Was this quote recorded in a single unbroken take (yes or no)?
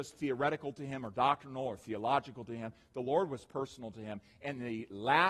yes